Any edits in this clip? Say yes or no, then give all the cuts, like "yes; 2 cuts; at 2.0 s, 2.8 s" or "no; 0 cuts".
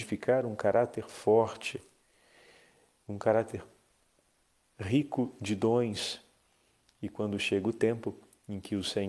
no; 0 cuts